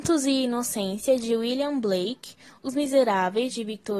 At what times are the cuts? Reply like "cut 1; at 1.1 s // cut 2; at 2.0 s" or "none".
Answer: none